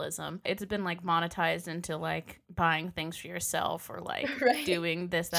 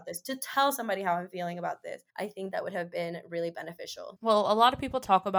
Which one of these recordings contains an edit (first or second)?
second